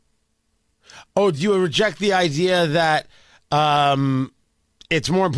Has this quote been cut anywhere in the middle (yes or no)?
no